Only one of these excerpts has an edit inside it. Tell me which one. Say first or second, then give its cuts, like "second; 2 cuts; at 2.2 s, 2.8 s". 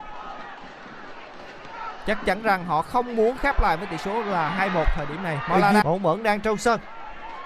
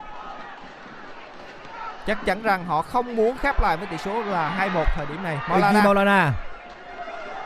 first; 1 cut; at 5.8 s